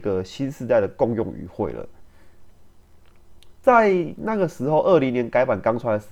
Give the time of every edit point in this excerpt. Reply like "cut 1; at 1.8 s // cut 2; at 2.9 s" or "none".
none

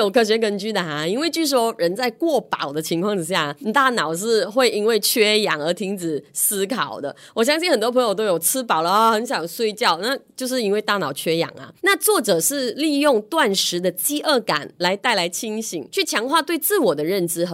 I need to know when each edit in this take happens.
none

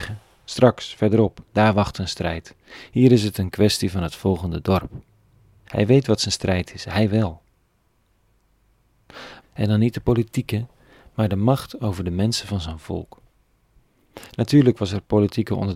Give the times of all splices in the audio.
cut 1; at 5.6 s // cut 2; at 9.4 s

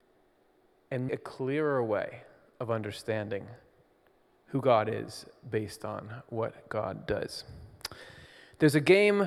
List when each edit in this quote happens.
cut 1; at 1.1 s

